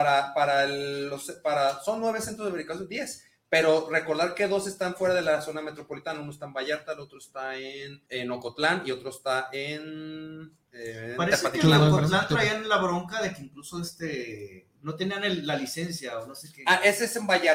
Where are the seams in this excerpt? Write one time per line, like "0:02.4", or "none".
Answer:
0:08.1
0:14.7